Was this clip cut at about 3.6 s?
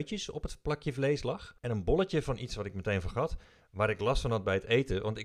no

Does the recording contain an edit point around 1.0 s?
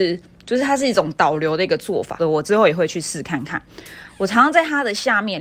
no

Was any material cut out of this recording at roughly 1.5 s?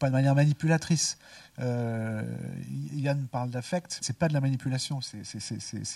no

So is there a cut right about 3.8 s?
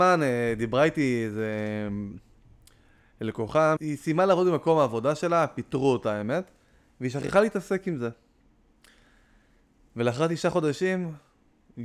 yes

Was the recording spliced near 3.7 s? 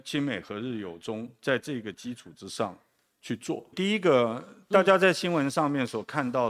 yes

